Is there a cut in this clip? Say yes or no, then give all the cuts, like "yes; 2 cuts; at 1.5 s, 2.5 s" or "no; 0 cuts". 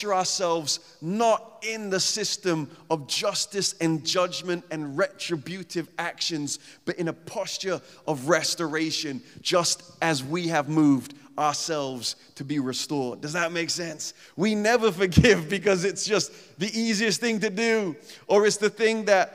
no; 0 cuts